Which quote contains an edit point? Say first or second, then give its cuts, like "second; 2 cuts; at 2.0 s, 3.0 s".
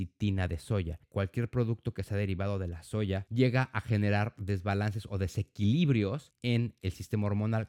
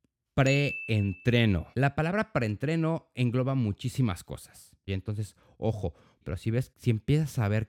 second; 3 cuts; at 1.7 s, 4.9 s, 6.2 s